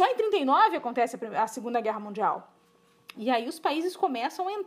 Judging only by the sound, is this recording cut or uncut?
cut